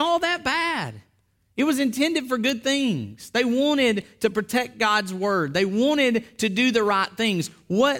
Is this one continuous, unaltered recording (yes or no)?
yes